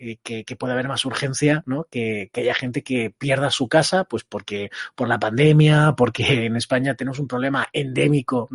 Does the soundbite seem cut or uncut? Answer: uncut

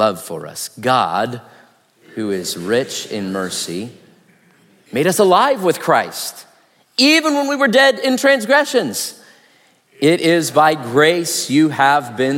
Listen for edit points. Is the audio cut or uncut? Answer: uncut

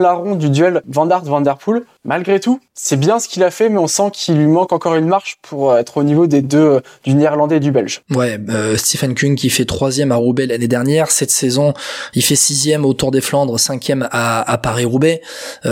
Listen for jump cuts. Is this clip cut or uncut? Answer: uncut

